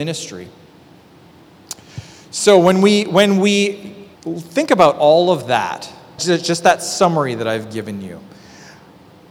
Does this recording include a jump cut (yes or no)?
yes